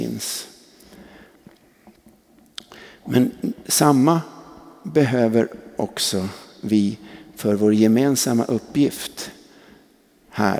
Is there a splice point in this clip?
no; 0 cuts

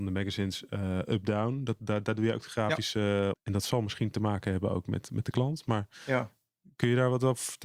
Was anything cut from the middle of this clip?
yes; 1 cut; at 3.3 s

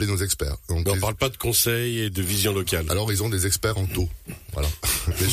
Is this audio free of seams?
yes; 0 cuts

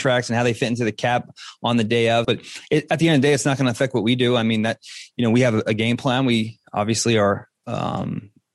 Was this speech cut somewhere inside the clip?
yes; 1 cut; at 2.2 s

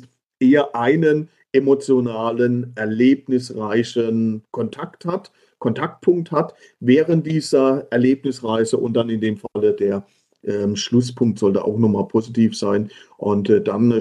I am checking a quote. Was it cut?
no; 0 cuts

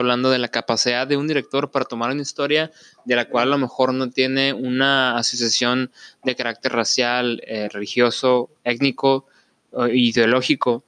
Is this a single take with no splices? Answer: yes; 0 cuts

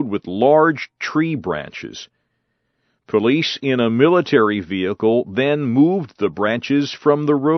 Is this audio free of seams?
yes; 0 cuts

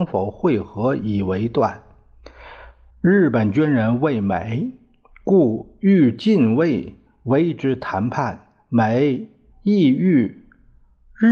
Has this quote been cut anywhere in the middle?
yes; 1 cut; at 2.9 s

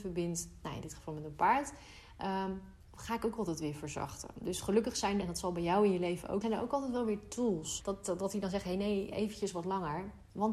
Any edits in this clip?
yes; 3 cuts; at 5.2 s, 6.4 s, 7.8 s

